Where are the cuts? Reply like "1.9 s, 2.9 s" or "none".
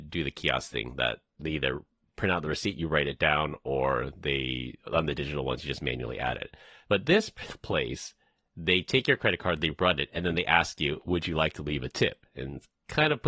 none